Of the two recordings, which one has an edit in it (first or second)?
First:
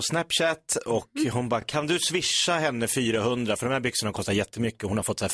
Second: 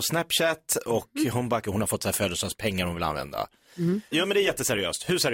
second